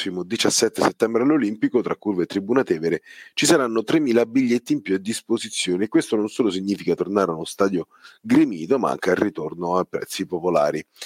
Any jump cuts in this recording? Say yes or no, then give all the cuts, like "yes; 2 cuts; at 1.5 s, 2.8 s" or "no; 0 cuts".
no; 0 cuts